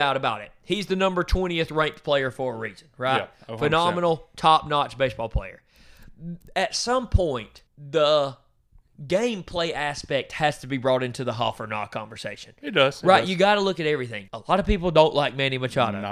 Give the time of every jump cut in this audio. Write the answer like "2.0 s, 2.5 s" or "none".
7.7 s, 14.3 s